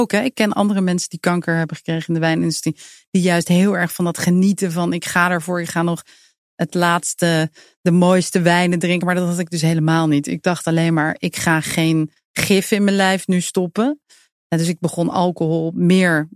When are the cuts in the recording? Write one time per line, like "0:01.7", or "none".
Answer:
none